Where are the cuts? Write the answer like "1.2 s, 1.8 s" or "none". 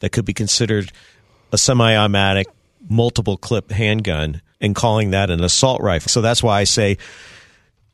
4.5 s, 6.1 s